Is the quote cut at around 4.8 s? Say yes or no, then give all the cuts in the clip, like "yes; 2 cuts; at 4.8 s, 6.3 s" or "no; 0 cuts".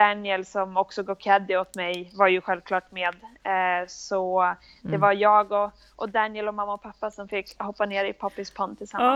no; 0 cuts